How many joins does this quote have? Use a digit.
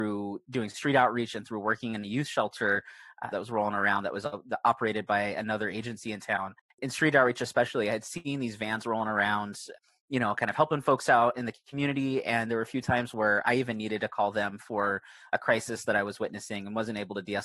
1